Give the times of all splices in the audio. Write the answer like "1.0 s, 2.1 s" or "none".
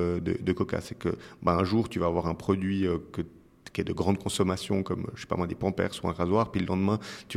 none